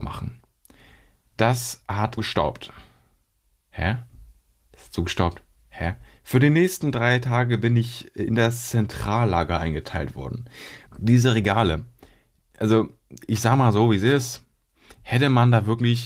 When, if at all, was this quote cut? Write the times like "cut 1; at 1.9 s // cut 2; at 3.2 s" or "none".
cut 1; at 2.2 s // cut 2; at 6.2 s // cut 3; at 10.9 s